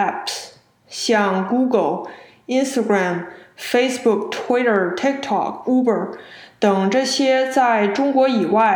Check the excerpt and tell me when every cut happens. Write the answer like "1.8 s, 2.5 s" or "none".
none